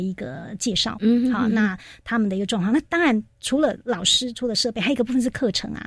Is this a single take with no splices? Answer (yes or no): no